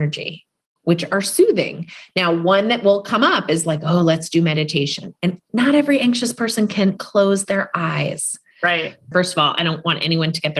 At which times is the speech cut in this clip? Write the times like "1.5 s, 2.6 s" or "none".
7.0 s, 9.1 s

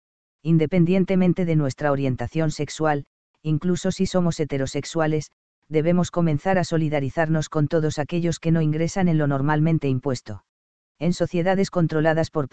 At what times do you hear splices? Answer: 10.9 s

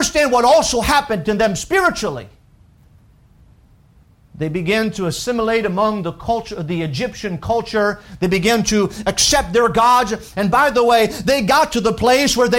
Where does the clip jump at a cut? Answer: none

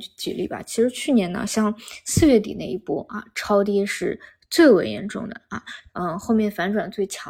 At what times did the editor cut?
5.9 s

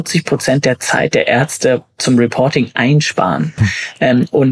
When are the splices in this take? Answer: 3.6 s

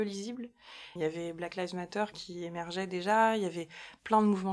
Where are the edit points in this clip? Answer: 1.0 s, 2.1 s

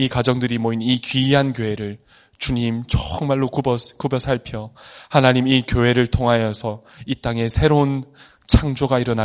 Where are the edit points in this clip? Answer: none

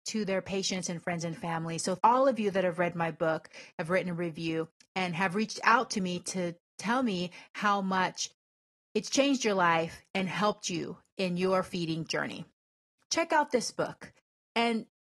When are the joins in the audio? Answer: 2.0 s, 13.0 s

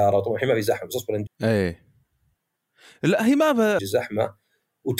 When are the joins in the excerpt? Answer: 1.3 s, 3.8 s

